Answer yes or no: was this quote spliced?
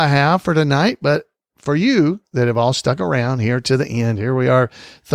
no